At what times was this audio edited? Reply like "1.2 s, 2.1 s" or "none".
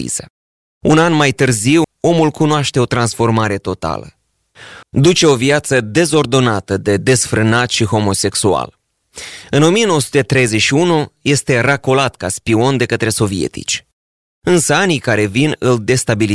1.8 s, 4.8 s

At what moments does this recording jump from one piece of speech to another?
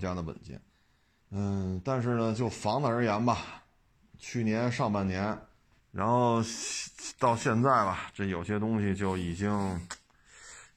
1.2 s, 5.8 s

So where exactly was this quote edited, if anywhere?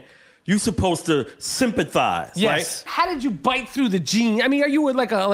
2.9 s

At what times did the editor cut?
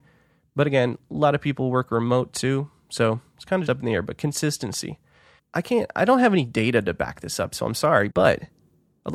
3.7 s, 5.4 s, 8.1 s

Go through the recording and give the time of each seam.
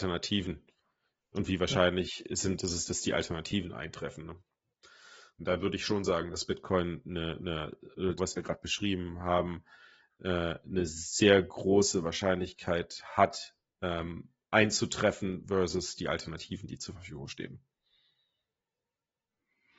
8.2 s

